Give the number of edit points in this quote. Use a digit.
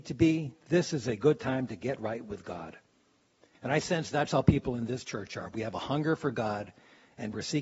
1